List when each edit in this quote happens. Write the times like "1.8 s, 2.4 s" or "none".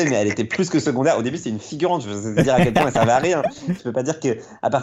2.0 s, 3.8 s